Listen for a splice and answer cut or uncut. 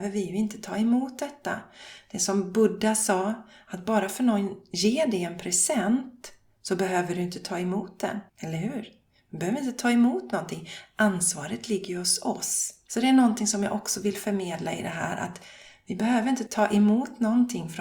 cut